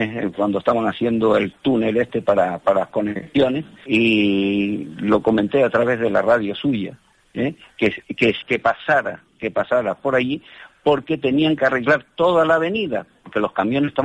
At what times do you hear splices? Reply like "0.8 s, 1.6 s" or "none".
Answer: 3.9 s, 8.4 s